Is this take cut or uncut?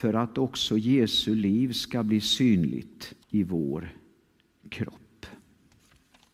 cut